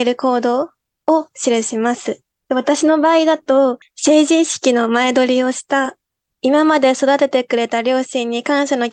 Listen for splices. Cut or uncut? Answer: uncut